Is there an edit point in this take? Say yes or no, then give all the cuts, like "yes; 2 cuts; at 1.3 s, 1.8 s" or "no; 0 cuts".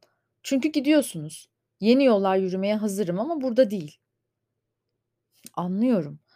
no; 0 cuts